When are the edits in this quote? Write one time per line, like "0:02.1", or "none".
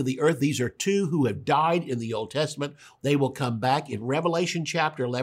0:03.0